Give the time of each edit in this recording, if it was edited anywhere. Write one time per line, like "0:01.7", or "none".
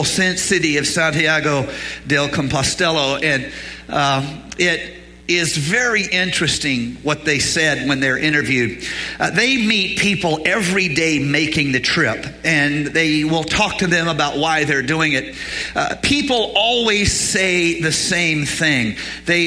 0:05.2